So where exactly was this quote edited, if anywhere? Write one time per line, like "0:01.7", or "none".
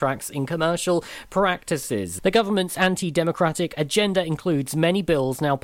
0:02.2